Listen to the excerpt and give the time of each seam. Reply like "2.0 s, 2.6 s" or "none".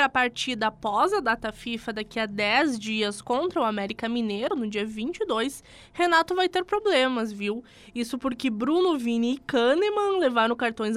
none